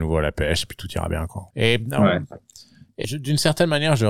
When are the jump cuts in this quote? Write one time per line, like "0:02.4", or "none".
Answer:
0:01.5
0:03.0